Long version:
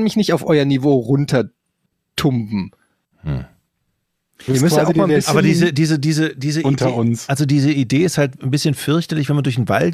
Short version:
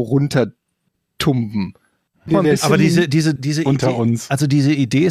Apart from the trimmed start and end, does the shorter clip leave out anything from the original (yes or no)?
yes